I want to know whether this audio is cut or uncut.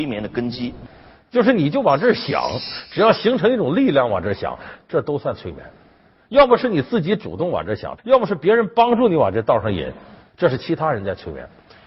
cut